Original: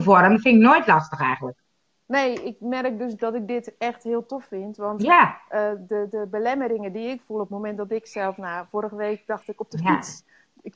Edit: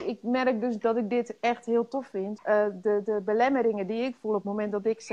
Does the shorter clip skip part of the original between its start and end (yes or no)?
yes